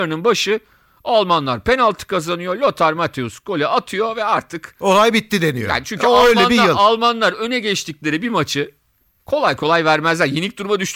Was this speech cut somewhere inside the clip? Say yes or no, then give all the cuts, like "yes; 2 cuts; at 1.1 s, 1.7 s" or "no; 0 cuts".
no; 0 cuts